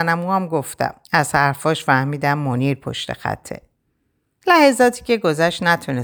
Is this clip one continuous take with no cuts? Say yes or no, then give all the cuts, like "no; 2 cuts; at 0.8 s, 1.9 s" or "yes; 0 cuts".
no; 2 cuts; at 1.0 s, 4.4 s